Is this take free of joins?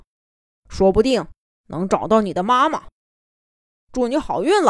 yes; 0 cuts

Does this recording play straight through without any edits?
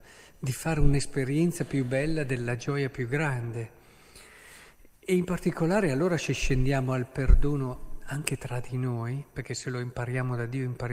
yes; 0 cuts

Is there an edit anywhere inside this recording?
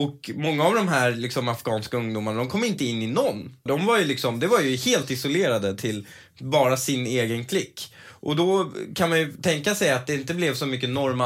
yes; 1 cut; at 3.7 s

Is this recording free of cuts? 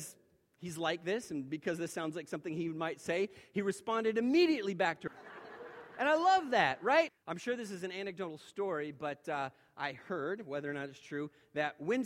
no; 2 cuts; at 5.1 s, 7.1 s

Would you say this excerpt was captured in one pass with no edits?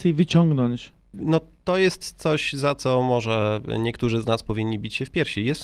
no; 1 cut; at 1.1 s

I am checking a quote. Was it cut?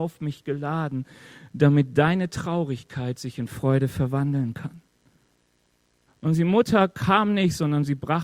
yes; 1 cut; at 6.1 s

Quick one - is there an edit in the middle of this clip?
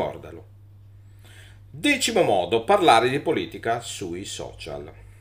no; 0 cuts

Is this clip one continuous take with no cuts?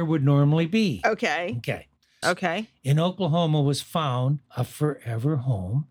no; 2 cuts; at 2.2 s, 4.5 s

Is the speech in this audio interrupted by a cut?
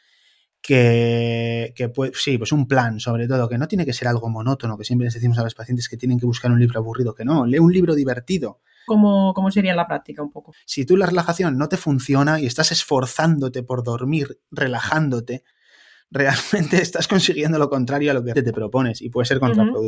yes; 3 cuts; at 8.9 s, 10.5 s, 18.3 s

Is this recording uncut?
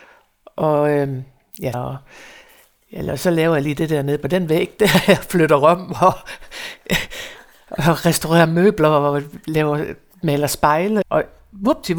no; 2 cuts; at 1.7 s, 11.0 s

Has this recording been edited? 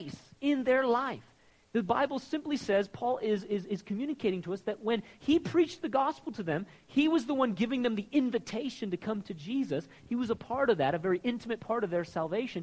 no; 0 cuts

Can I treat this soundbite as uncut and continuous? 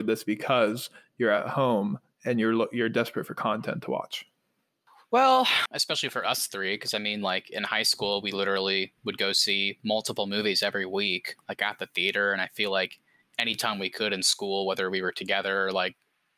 no; 1 cut; at 5.7 s

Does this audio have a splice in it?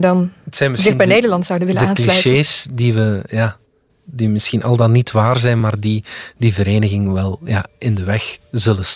no; 0 cuts

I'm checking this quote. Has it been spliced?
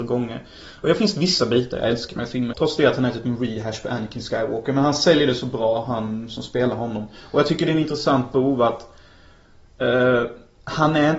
yes; 1 cut; at 2.5 s

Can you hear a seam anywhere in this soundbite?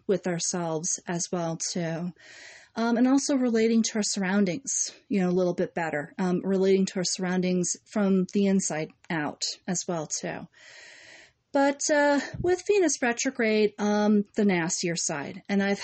yes; 1 cut; at 14.3 s

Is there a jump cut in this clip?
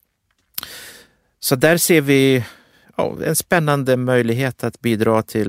no; 0 cuts

